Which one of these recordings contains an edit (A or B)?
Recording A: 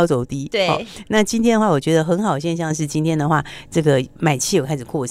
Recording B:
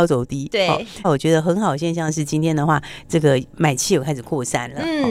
B